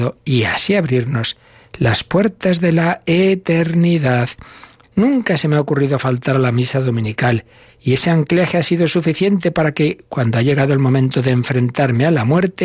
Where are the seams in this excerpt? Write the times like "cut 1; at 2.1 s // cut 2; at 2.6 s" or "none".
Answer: cut 1; at 4.8 s